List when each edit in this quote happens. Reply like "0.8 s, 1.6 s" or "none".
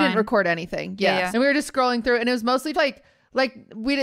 1.3 s, 2.7 s